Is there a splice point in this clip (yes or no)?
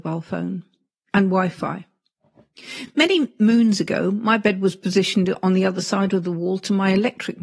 no